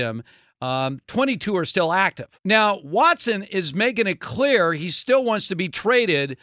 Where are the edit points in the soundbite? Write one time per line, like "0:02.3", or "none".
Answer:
0:02.4